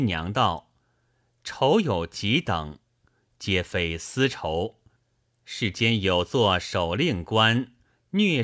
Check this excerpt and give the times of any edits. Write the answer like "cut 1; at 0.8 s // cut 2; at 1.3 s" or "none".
none